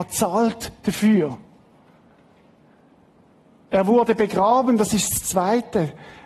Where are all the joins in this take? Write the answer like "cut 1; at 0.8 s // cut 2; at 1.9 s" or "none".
none